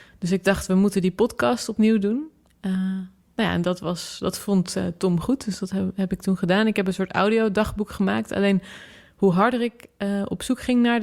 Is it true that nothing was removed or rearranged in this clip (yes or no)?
yes